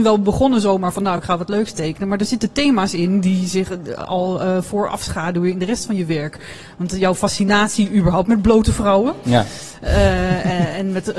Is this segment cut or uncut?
uncut